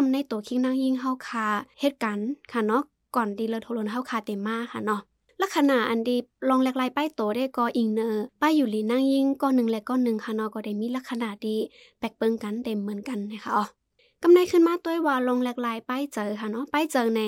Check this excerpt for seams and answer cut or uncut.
uncut